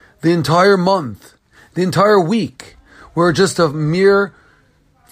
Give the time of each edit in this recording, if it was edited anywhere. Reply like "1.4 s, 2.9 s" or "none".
none